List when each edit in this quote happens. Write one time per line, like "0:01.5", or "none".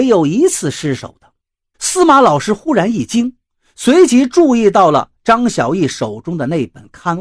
0:01.7